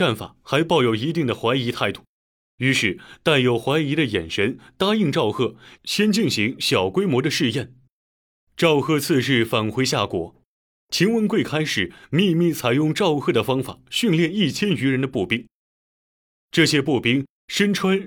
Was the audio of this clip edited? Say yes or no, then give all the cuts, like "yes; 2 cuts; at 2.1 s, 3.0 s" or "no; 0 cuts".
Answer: no; 0 cuts